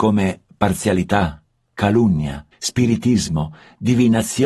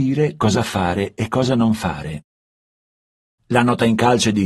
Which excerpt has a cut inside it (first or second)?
first